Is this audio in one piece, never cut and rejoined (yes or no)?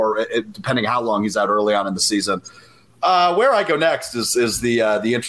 yes